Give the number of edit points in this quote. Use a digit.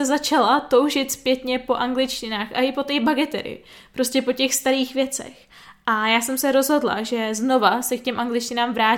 0